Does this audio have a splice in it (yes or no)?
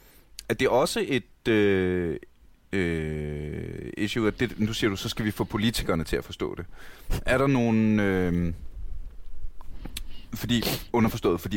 no